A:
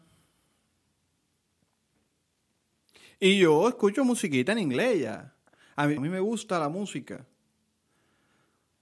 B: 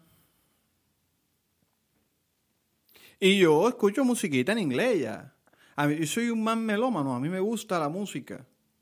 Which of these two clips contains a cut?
A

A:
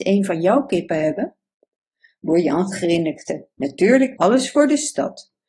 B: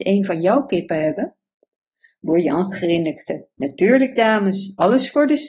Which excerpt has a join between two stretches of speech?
A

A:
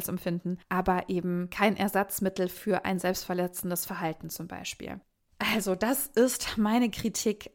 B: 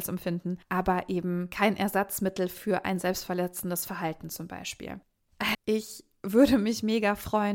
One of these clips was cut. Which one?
B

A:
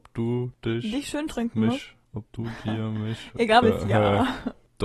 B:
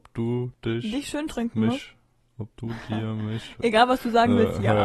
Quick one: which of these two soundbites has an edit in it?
A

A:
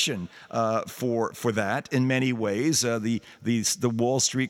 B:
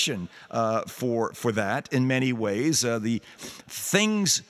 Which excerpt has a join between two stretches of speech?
B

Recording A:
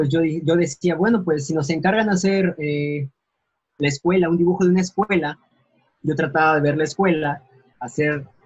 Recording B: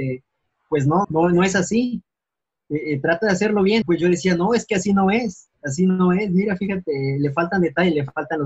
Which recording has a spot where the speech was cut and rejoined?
B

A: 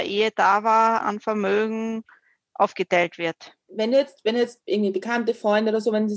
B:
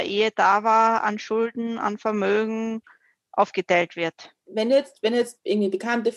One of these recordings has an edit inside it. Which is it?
A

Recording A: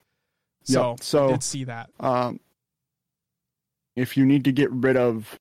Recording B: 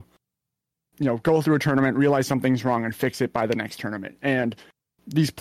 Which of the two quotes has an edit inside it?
A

